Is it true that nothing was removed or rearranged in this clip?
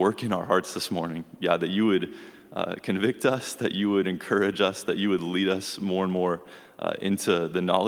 yes; 0 cuts

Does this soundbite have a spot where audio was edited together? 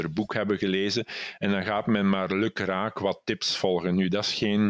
no; 0 cuts

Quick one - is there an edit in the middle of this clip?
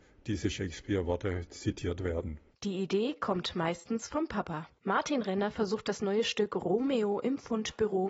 yes; 2 cuts; at 2.5 s, 4.8 s

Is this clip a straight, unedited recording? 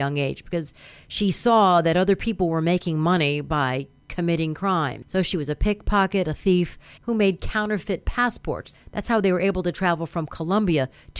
no; 1 cut; at 7.0 s

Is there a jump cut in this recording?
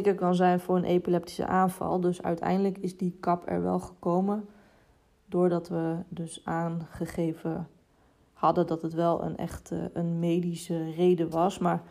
no; 0 cuts

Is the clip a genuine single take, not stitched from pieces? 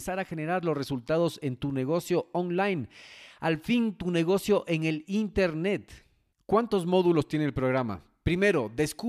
yes; 0 cuts

